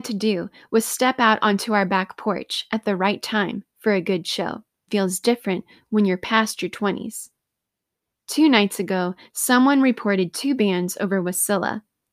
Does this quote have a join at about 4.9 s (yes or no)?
yes